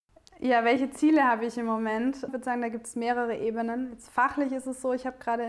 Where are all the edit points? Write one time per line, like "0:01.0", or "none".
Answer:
0:02.3